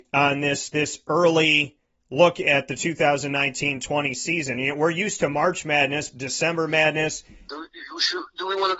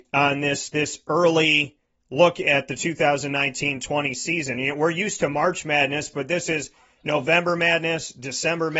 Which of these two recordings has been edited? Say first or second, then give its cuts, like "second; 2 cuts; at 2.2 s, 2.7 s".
first; 2 cuts; at 6.1 s, 7.5 s